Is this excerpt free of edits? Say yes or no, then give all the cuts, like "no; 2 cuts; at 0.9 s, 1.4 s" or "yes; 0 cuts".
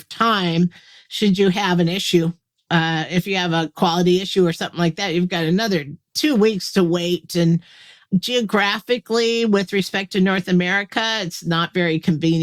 yes; 0 cuts